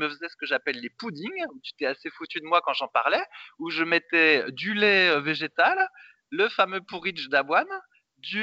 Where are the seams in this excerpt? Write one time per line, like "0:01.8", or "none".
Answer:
none